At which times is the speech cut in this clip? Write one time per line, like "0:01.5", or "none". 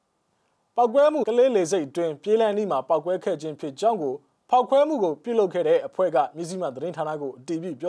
0:01.2